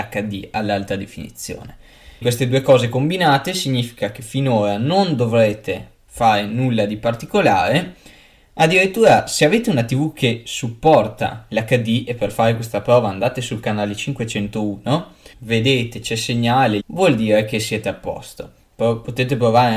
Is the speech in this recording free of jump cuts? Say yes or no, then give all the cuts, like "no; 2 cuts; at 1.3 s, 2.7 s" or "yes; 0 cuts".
no; 3 cuts; at 2.2 s, 15.3 s, 16.8 s